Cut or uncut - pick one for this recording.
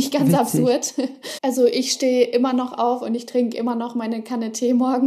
cut